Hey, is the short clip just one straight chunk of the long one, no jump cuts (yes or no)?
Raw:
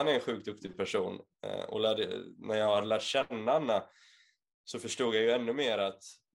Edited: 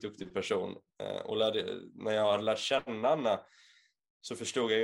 yes